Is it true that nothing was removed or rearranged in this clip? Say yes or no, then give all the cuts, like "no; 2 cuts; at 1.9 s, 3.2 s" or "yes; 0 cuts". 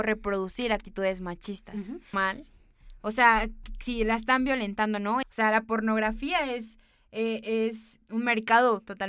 no; 3 cuts; at 2.1 s, 5.2 s, 8.0 s